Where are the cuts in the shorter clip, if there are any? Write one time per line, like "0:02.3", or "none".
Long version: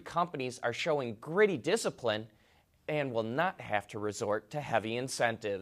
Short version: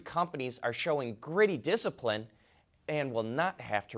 none